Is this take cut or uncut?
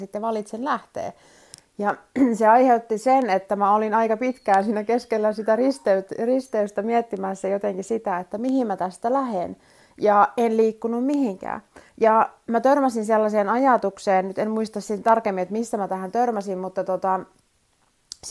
uncut